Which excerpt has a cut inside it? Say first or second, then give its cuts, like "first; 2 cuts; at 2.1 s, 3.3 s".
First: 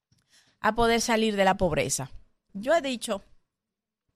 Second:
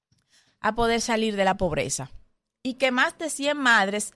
first; 1 cut; at 2.5 s